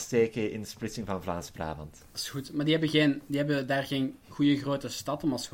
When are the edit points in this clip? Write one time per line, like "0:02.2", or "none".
none